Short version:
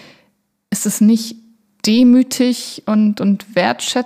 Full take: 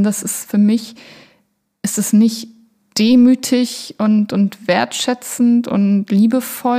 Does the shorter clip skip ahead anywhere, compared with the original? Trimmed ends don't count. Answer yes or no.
no